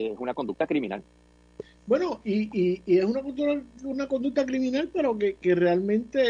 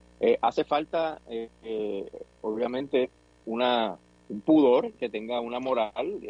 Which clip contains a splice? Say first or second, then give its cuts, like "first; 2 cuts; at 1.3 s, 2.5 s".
second; 1 cut; at 3.4 s